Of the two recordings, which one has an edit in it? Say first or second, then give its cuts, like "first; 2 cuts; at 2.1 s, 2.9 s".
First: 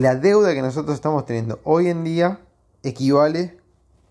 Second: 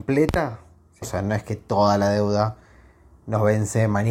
second; 1 cut; at 1.0 s